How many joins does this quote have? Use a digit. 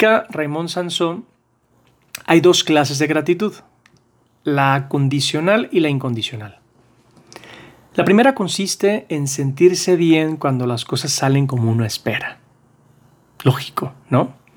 0